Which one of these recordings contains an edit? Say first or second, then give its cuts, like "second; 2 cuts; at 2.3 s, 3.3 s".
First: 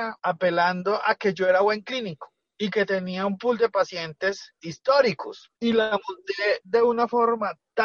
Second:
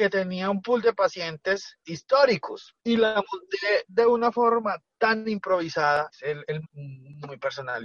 second; 1 cut; at 6.6 s